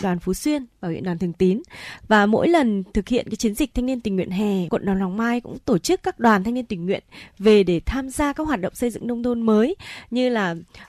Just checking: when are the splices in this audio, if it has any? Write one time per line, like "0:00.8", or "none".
0:04.7